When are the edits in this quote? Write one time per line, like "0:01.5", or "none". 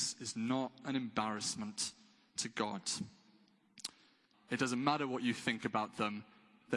0:04.3

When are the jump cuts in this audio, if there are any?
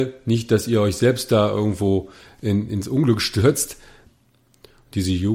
0:04.1

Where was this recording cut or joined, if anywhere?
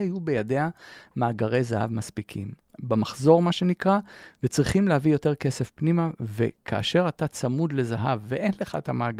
0:02.6

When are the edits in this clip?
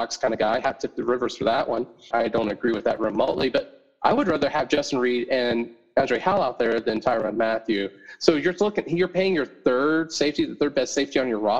0:02.1

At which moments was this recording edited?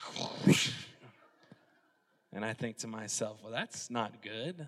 none

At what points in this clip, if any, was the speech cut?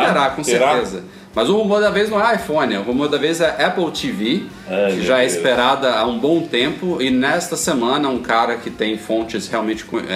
none

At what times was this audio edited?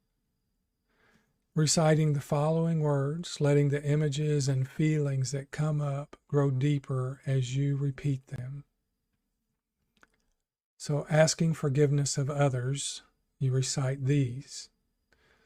none

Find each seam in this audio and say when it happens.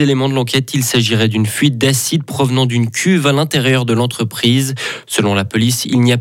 none

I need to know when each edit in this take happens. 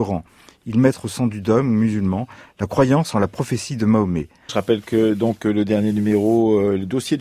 0:04.5

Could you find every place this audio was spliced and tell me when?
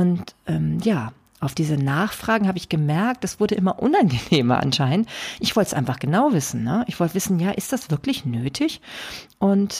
none

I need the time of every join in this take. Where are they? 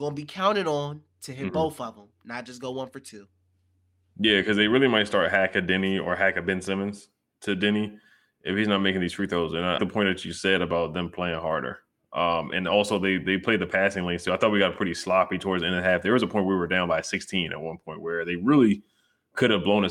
0:09.8

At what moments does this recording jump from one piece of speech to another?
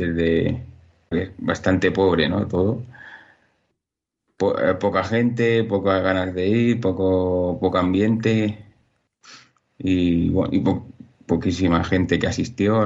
0:01.1

